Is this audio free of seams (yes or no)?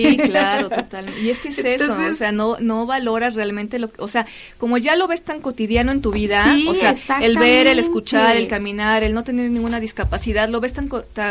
yes